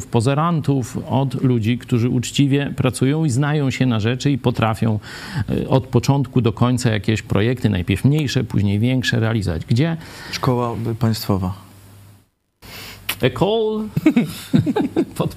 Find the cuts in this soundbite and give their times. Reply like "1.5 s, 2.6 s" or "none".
none